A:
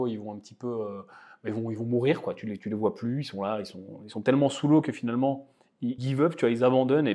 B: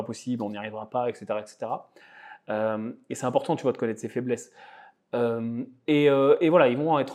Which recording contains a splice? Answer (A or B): A